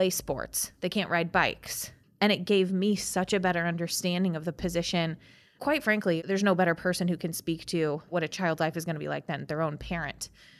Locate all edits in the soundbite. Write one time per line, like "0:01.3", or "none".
0:02.0